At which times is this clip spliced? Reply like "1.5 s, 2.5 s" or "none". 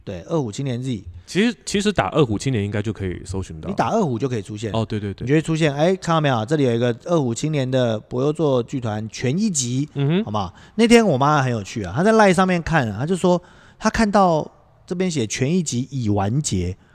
none